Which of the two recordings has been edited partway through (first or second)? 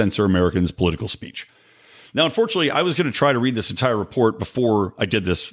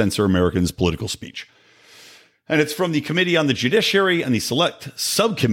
first